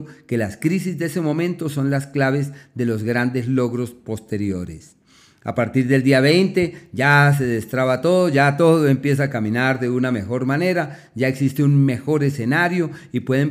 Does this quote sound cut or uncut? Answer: uncut